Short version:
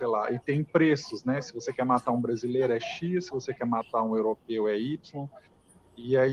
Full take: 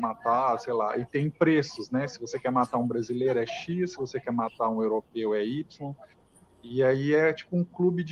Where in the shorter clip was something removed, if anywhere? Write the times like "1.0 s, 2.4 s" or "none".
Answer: none